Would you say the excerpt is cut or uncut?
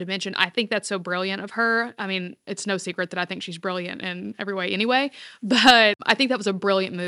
uncut